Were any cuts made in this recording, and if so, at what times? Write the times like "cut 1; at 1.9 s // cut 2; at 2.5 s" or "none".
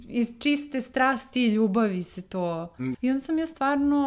cut 1; at 2.9 s